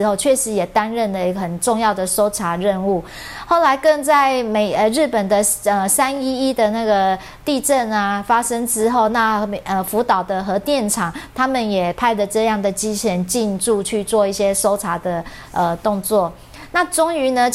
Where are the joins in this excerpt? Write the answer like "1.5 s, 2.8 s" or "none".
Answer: none